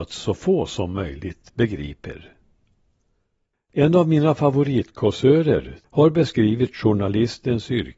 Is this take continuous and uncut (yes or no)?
no